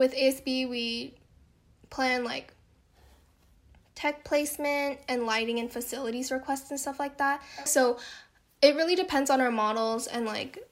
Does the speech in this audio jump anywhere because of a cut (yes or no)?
yes